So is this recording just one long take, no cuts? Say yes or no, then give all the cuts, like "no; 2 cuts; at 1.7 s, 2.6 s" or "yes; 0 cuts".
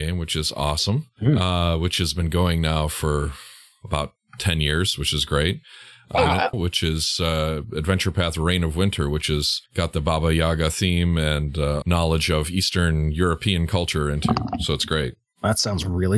no; 3 cuts; at 6.5 s, 9.7 s, 11.8 s